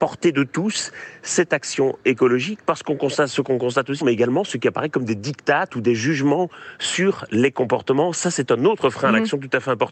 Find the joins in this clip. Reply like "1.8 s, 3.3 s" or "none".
4.0 s